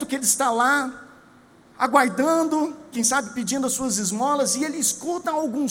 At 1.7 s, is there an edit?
no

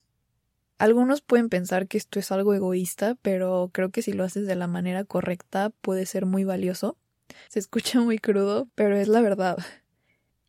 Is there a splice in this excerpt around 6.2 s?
no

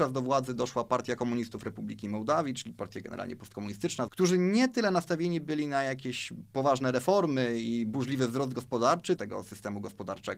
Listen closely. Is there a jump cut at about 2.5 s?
no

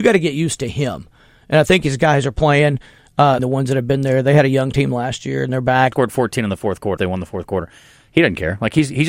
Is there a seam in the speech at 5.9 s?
yes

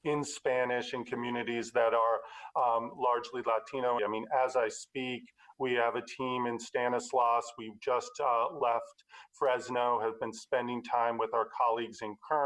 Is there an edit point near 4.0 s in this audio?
yes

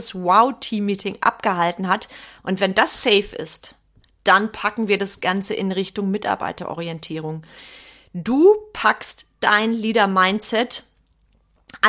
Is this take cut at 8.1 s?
no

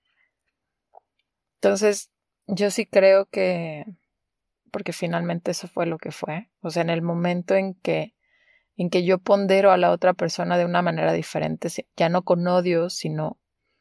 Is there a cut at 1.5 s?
no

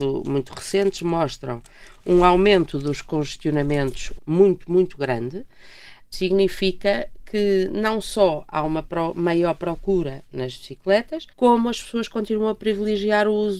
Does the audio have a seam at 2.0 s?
no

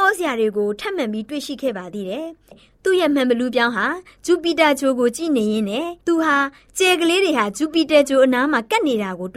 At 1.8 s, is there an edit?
no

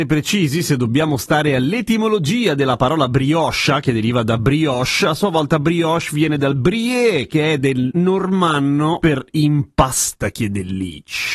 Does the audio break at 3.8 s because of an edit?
no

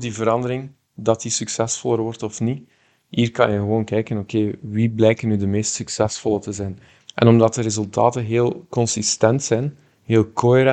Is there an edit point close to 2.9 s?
no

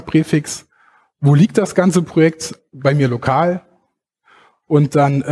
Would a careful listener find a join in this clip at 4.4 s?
no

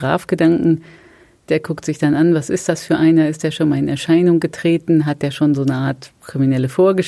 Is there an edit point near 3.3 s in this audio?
no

